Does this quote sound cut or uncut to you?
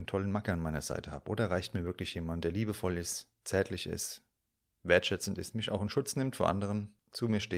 uncut